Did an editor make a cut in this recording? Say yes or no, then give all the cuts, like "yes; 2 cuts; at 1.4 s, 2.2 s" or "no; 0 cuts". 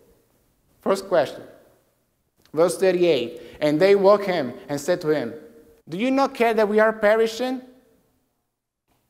yes; 1 cut; at 5.8 s